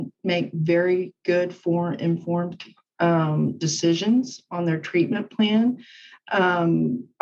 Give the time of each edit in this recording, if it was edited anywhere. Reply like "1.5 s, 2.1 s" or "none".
none